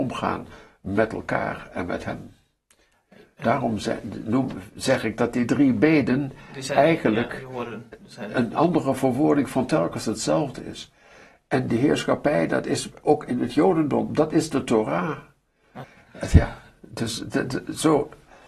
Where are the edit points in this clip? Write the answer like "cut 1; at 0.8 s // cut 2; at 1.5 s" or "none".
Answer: cut 1; at 15.8 s